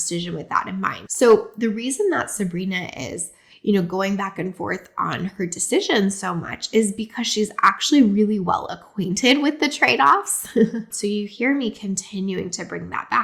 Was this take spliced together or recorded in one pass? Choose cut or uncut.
cut